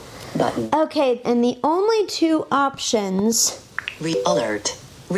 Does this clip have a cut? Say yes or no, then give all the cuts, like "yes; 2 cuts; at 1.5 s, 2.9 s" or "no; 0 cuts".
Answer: yes; 1 cut; at 1.2 s